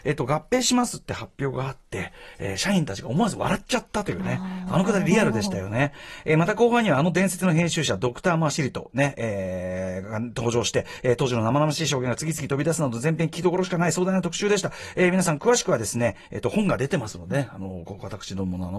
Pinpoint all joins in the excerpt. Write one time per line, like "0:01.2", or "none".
none